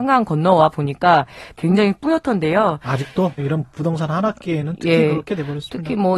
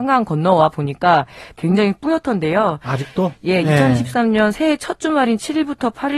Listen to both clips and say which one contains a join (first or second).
first